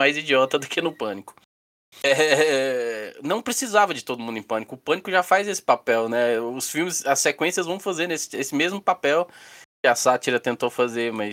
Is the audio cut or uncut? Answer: uncut